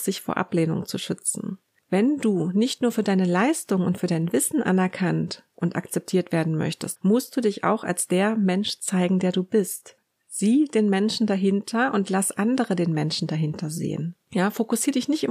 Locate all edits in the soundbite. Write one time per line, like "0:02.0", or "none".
0:06.9